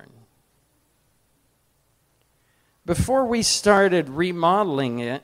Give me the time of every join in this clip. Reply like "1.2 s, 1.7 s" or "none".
none